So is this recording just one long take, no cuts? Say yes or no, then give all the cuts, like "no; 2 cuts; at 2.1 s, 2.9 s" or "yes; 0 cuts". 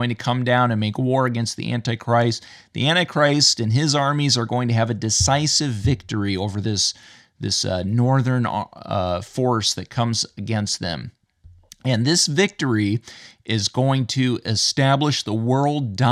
yes; 0 cuts